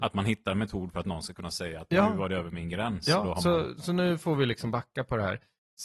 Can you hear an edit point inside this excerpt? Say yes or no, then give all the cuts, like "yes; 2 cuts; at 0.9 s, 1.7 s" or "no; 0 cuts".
no; 0 cuts